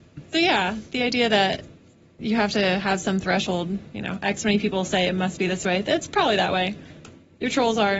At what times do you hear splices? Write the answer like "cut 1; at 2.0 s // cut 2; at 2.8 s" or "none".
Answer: none